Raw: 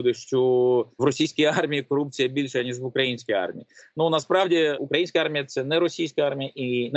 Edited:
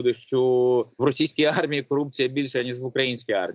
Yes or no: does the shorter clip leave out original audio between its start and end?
no